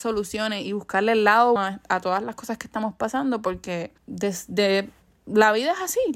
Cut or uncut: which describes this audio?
cut